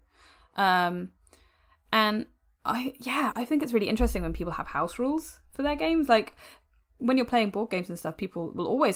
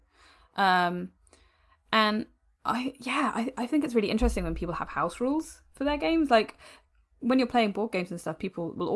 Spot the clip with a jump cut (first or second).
first